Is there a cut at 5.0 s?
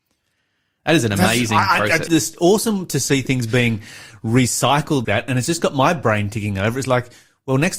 yes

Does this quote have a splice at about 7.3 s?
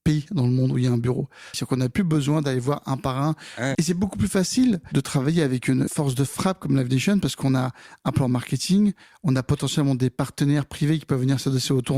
no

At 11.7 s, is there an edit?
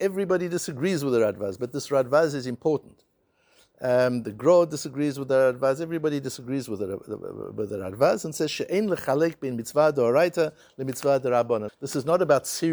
yes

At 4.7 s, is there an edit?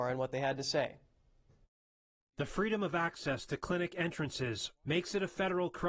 yes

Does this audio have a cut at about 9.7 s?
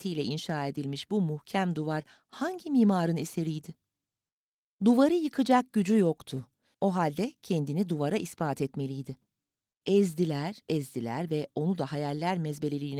yes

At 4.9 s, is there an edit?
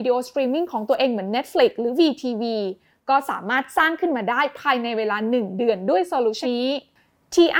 no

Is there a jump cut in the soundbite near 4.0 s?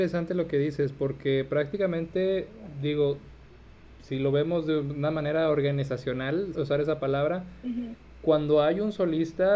no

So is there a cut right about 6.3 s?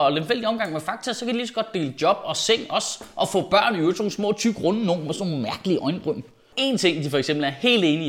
no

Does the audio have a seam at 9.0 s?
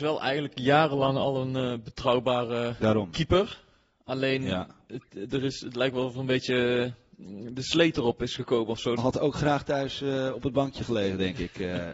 yes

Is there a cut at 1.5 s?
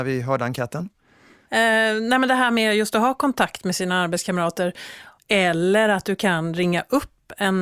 no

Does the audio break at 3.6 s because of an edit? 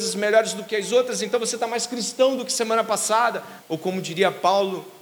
yes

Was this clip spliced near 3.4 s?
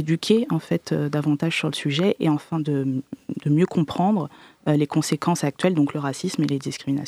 no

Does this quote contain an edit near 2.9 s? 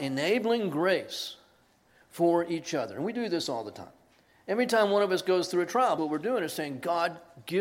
no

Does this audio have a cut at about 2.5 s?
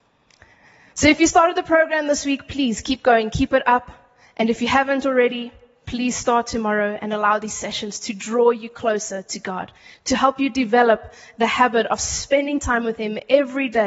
no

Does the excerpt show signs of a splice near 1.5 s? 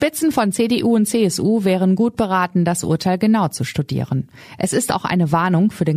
no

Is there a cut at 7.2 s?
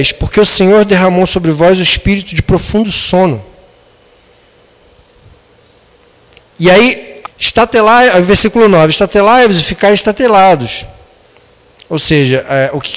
yes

